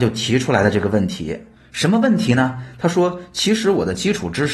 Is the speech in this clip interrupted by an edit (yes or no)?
no